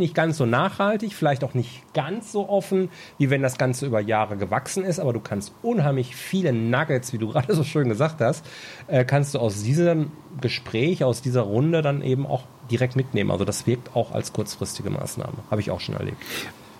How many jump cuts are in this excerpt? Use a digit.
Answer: 0